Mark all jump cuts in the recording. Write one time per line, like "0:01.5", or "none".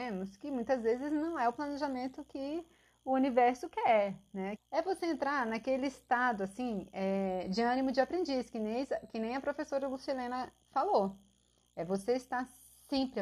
0:04.6

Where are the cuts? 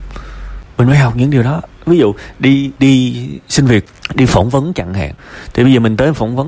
0:02.8

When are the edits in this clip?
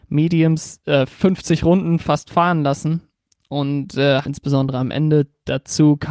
0:04.3

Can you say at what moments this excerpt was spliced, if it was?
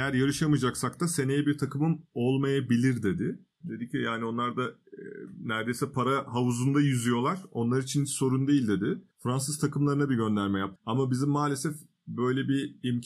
0:03.6
0:09.1
0:10.8

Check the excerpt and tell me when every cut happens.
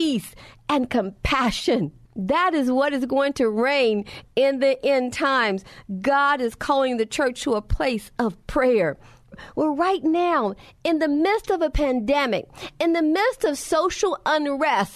0:09.3

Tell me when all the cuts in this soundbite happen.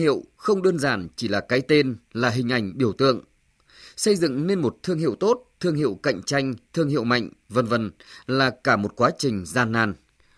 none

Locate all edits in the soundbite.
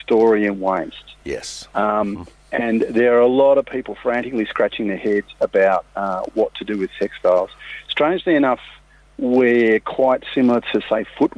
none

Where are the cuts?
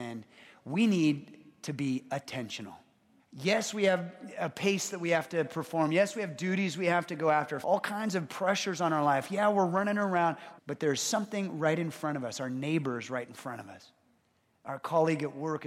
0:03.2
0:07.6
0:10.6

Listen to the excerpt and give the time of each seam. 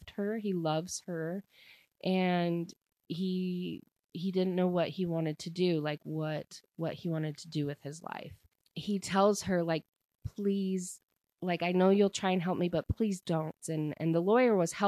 0:13.6

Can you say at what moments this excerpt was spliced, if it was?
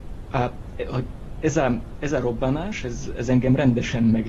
none

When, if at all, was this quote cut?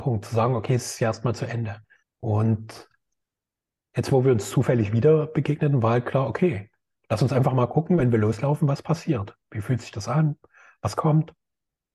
0:02.0
0:09.5

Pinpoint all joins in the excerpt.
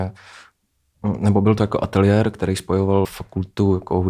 0:03.0

